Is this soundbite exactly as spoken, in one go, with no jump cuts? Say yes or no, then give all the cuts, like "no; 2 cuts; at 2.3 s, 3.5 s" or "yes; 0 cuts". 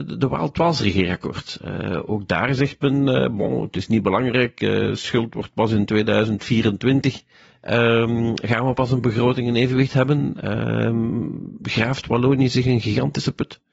yes; 0 cuts